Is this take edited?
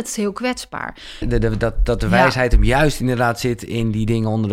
yes; 1 cut; at 1.2 s

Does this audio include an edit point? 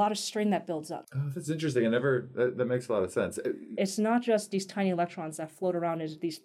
yes; 2 cuts; at 1.0 s, 3.8 s

